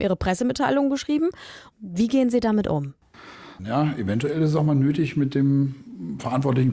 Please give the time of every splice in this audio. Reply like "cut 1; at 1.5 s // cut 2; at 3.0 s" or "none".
cut 1; at 1.7 s // cut 2; at 3.6 s